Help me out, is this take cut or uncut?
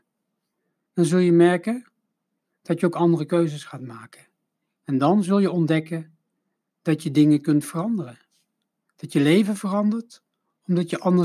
uncut